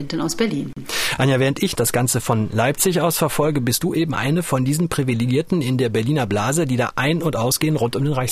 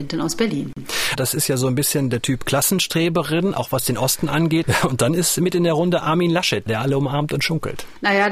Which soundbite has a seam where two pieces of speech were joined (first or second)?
second